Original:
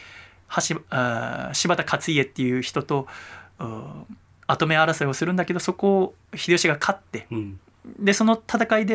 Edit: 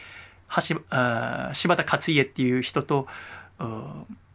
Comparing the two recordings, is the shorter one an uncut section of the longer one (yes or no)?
yes